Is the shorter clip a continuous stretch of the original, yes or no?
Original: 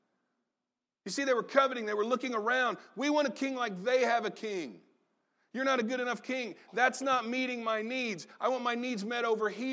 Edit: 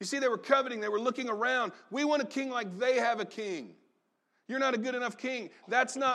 yes